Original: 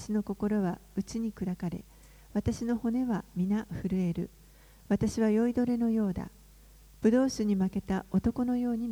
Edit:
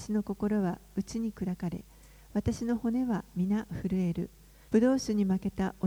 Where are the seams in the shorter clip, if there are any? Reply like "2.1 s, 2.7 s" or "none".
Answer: 4.7 s